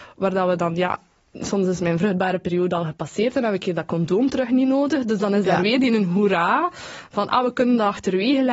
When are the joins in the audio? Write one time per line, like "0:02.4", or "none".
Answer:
none